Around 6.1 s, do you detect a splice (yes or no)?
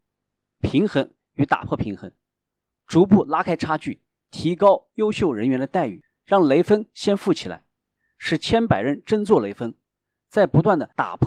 no